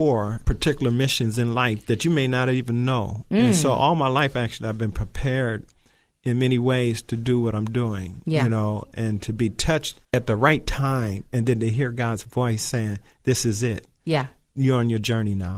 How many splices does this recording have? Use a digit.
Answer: 0